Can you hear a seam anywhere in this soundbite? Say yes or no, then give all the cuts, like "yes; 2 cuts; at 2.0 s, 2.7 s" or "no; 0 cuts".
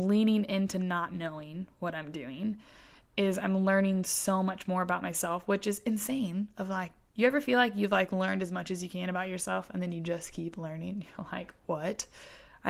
no; 0 cuts